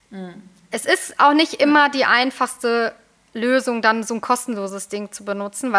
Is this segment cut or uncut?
uncut